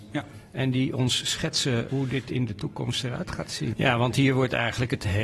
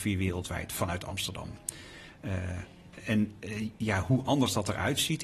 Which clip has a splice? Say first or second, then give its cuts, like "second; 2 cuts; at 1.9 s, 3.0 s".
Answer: first; 2 cuts; at 1.9 s, 3.7 s